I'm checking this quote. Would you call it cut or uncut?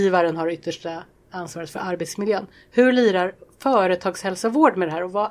uncut